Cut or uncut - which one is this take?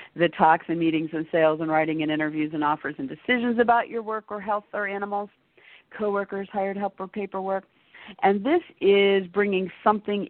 uncut